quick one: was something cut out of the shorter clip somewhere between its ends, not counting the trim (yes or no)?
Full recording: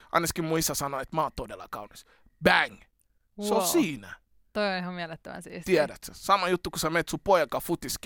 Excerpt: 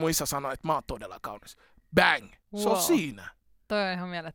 yes